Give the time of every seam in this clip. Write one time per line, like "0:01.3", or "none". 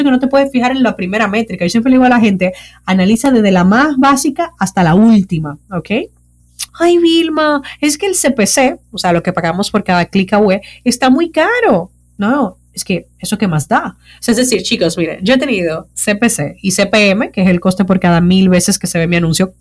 0:06.7